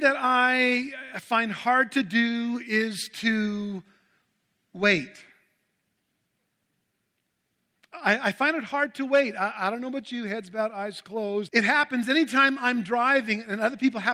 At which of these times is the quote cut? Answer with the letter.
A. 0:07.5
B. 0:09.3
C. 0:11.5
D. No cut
C